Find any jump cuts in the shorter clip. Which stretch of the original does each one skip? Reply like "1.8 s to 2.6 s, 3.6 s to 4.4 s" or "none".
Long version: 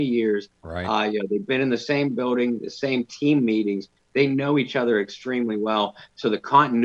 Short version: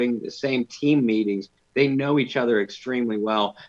none